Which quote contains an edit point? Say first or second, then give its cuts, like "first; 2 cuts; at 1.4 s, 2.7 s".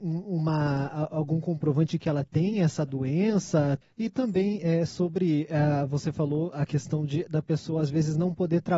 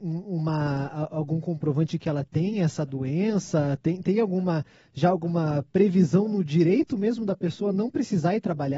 first; 1 cut; at 3.8 s